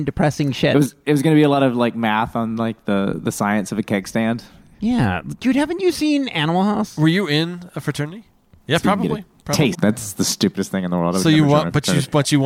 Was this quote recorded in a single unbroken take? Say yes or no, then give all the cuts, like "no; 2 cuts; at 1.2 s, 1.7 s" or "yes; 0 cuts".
no; 2 cuts; at 8.5 s, 9.7 s